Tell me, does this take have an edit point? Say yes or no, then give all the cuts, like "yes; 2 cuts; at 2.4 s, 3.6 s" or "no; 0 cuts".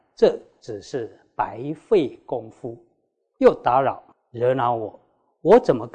no; 0 cuts